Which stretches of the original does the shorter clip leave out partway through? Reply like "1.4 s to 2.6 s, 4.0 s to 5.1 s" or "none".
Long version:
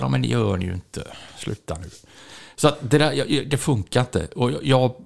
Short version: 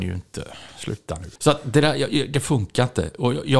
2.0 s to 2.5 s